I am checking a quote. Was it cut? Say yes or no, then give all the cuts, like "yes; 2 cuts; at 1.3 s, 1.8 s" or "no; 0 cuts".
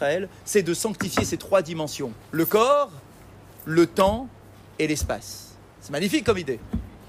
no; 0 cuts